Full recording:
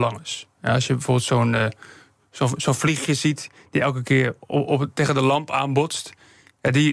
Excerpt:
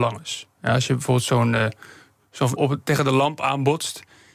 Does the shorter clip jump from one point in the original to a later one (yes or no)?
yes